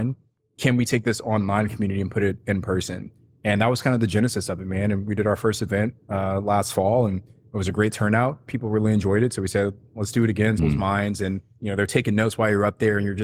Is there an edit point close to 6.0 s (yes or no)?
no